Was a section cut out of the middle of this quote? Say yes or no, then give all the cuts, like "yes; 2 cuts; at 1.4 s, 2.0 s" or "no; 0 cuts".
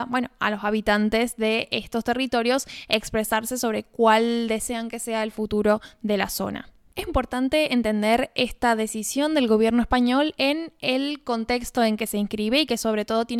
yes; 1 cut; at 7.1 s